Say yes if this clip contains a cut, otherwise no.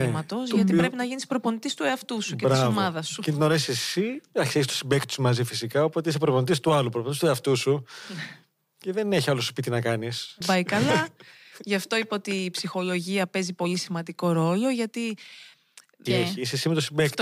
yes